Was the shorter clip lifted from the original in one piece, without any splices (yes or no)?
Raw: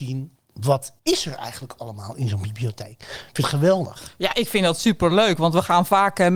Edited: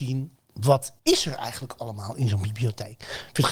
yes